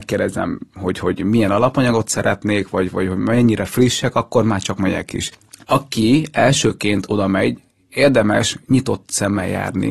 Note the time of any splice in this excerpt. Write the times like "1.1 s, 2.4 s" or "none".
none

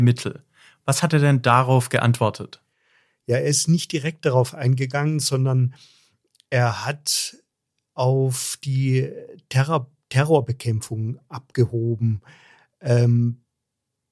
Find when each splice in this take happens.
none

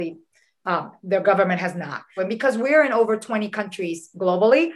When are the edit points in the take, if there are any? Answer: 2.2 s

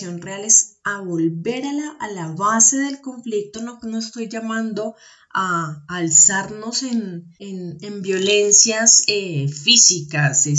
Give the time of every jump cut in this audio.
3.5 s, 7.4 s

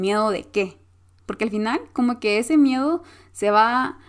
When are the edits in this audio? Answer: 1.2 s

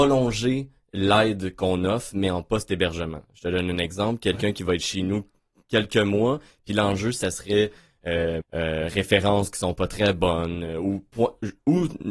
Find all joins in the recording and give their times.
8.4 s

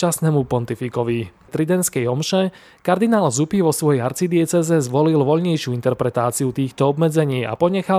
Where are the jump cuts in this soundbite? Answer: 1.5 s

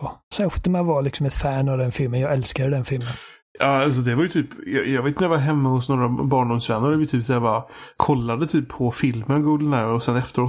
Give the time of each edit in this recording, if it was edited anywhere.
8.0 s

